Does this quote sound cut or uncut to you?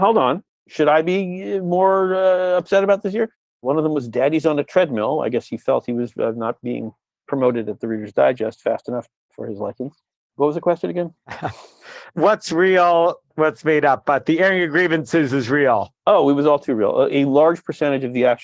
uncut